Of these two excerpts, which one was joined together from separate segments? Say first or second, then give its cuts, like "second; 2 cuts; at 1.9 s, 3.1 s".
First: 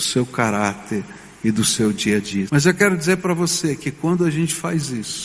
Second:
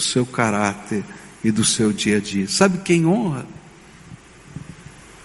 first; 1 cut; at 2.5 s